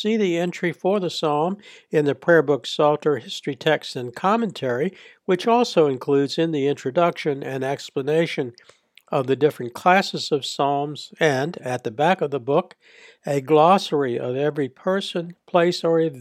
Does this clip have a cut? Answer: no; 0 cuts

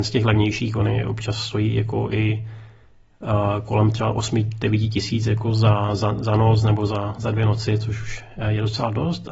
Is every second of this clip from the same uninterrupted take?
yes; 0 cuts

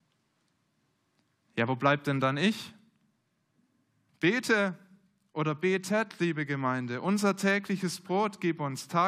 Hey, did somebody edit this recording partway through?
yes; 1 cut; at 4.1 s

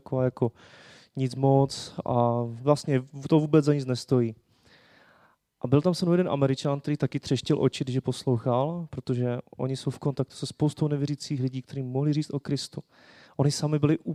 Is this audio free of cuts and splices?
yes; 0 cuts

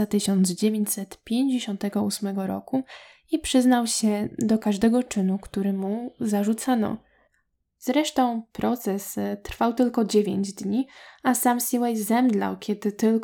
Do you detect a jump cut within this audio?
yes; 1 cut; at 7.6 s

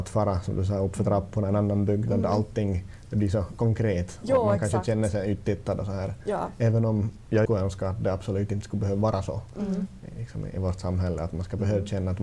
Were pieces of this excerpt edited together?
yes; 1 cut; at 7.5 s

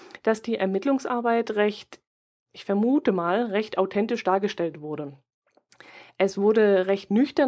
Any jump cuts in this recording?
no; 0 cuts

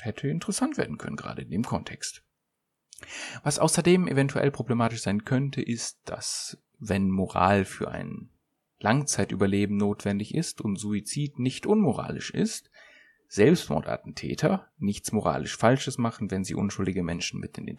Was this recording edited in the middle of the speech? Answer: no; 0 cuts

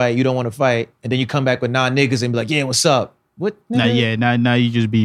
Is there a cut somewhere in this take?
no; 0 cuts

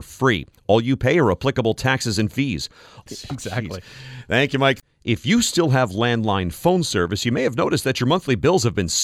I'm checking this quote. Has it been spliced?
yes; 1 cut; at 3.1 s

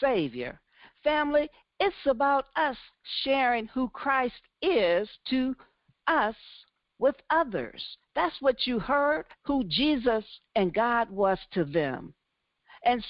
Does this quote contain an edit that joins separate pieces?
no; 0 cuts

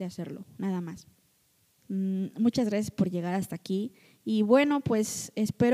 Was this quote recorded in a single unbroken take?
no; 1 cut; at 1.8 s

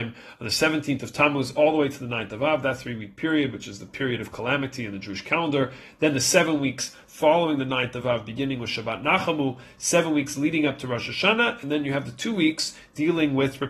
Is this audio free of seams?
yes; 0 cuts

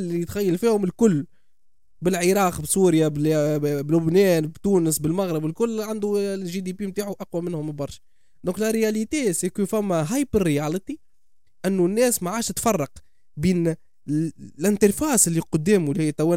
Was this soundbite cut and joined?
no; 0 cuts

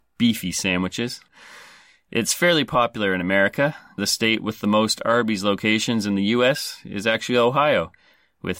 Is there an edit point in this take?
yes; 2 cuts; at 1.3 s, 4.0 s

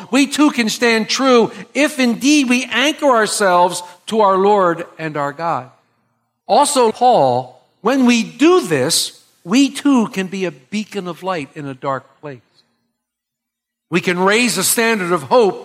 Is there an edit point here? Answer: yes; 1 cut; at 6.9 s

